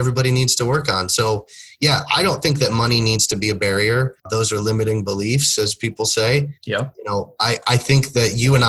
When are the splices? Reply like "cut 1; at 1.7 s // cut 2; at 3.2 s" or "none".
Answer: none